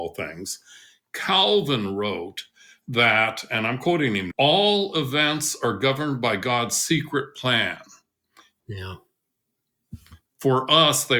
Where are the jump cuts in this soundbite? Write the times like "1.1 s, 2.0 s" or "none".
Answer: 4.3 s, 8.6 s, 10.3 s